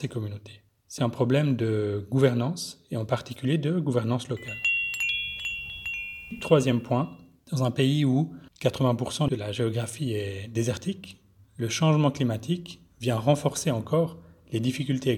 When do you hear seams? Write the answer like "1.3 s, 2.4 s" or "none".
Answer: 1.0 s, 8.5 s